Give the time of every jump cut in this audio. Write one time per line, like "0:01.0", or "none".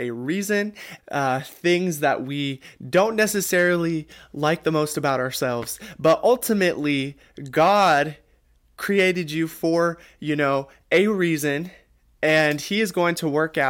0:01.0